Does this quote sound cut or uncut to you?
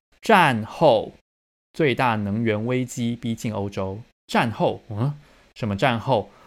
uncut